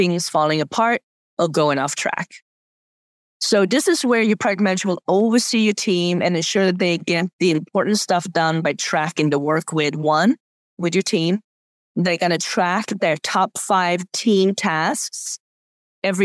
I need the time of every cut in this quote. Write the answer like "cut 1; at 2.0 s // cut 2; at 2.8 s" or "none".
cut 1; at 10.7 s

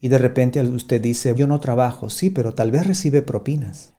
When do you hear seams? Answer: cut 1; at 1.3 s

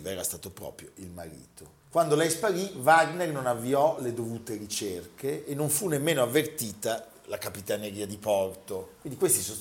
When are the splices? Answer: none

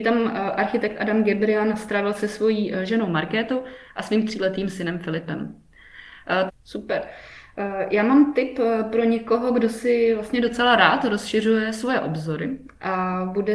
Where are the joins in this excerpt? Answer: cut 1; at 6.5 s

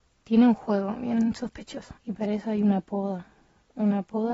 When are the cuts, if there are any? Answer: cut 1; at 2.0 s

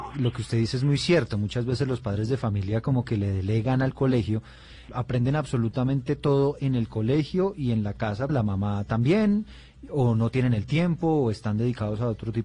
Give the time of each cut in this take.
cut 1; at 4.9 s // cut 2; at 8.3 s

